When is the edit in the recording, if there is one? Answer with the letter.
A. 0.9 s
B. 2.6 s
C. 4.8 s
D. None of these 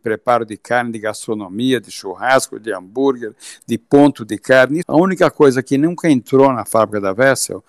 C